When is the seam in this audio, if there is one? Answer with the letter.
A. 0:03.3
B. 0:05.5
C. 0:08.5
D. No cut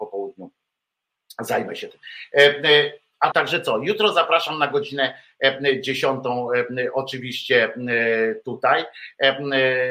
A